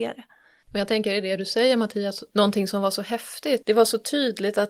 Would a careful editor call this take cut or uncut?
cut